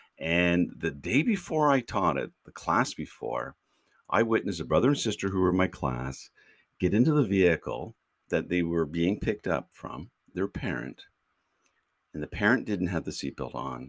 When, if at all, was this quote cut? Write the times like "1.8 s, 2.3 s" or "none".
10.3 s